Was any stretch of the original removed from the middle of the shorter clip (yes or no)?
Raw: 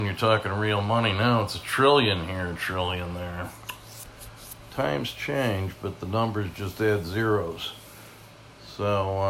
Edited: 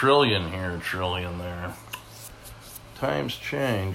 no